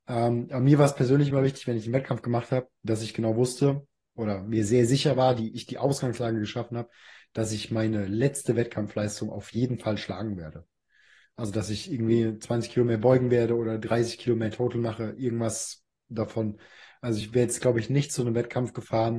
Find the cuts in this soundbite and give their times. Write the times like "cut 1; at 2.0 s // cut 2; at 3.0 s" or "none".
none